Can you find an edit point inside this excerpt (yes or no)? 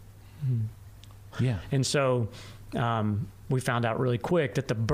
yes